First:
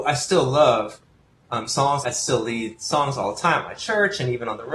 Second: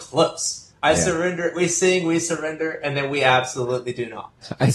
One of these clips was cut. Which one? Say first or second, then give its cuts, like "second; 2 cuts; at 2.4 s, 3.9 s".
first; 1 cut; at 2.0 s